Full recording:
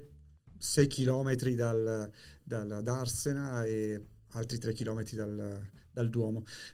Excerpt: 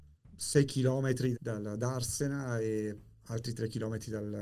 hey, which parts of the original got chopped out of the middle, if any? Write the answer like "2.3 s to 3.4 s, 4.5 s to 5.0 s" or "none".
1.6 s to 2.4 s

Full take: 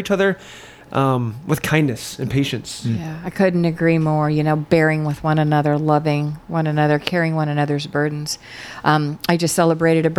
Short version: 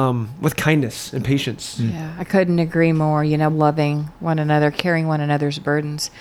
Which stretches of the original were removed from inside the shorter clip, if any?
4.6 s to 5.8 s

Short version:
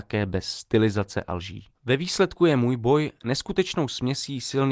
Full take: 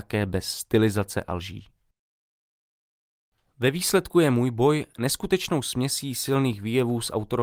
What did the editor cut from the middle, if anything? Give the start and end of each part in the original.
1.7 s to 3.5 s

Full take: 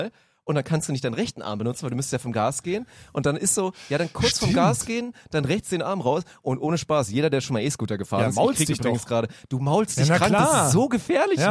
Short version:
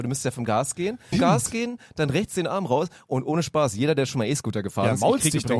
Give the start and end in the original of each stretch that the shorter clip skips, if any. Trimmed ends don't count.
3.0 s to 4.5 s

